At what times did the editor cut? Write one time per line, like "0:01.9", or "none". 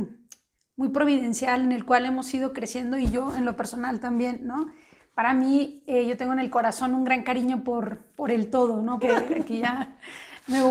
0:09.0